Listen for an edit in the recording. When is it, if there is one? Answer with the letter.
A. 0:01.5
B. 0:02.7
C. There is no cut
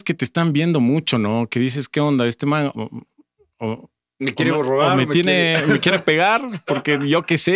B